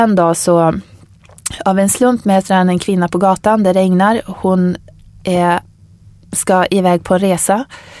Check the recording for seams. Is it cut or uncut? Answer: uncut